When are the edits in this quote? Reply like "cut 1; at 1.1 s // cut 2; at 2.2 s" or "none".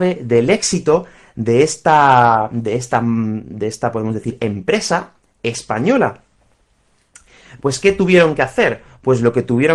cut 1; at 7.6 s